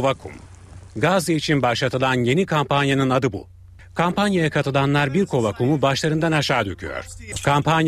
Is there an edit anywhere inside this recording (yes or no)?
no